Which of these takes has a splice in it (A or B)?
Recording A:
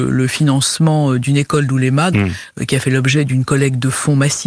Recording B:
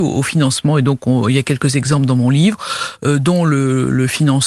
A